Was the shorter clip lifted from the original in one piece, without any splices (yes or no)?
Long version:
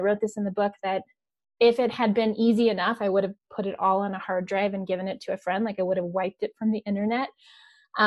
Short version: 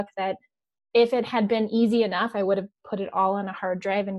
yes